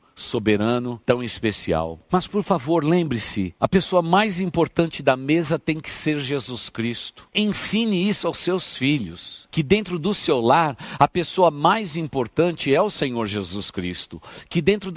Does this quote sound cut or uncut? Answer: uncut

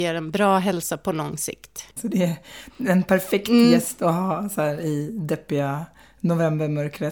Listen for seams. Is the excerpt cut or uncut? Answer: cut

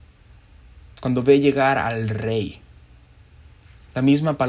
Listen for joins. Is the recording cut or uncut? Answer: cut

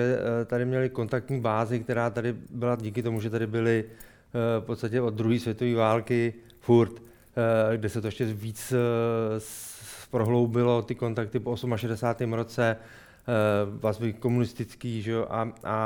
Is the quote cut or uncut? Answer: uncut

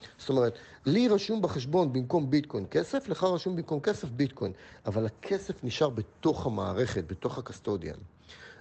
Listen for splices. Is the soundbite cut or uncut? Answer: uncut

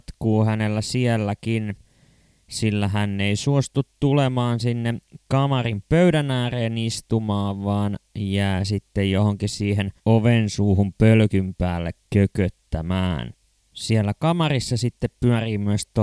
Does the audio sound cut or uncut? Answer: cut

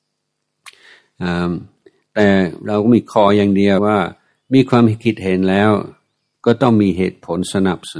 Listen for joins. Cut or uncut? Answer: cut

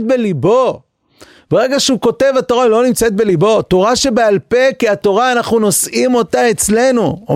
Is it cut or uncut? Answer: uncut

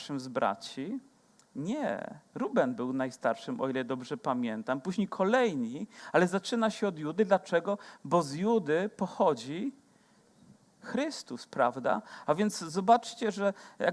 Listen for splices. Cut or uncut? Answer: uncut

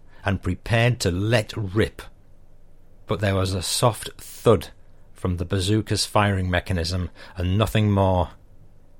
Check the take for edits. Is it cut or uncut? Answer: uncut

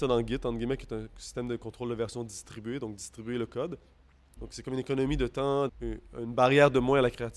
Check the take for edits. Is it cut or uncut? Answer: cut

